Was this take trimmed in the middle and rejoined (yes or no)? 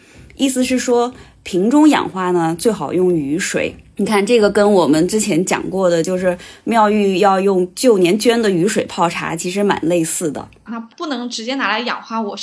yes